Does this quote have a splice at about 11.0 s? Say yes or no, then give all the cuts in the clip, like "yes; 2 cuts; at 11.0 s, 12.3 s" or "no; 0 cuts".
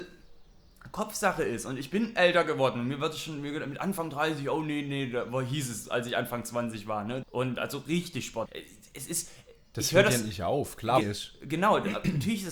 yes; 3 cuts; at 7.2 s, 8.5 s, 11.0 s